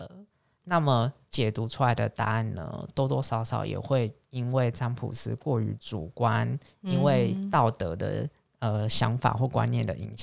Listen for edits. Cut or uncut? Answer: uncut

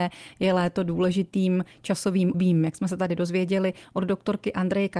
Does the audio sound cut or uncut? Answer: cut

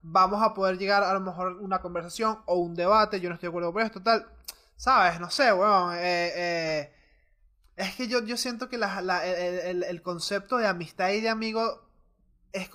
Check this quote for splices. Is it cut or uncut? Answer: uncut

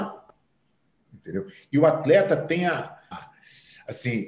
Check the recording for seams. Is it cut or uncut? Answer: cut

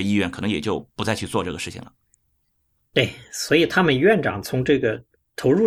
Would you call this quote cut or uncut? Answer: uncut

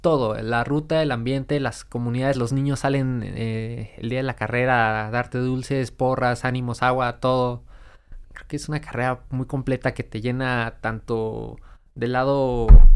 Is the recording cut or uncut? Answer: uncut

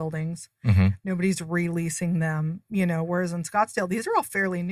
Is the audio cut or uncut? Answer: cut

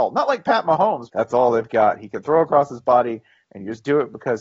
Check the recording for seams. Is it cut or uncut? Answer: cut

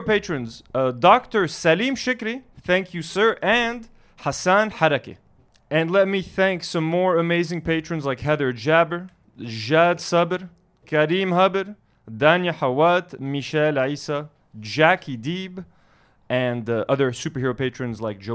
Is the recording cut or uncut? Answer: uncut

